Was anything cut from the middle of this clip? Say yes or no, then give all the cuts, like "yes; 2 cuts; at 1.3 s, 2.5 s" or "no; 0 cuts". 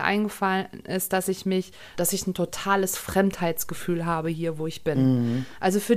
yes; 1 cut; at 1.9 s